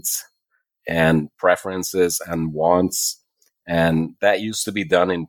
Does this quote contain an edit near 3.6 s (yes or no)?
no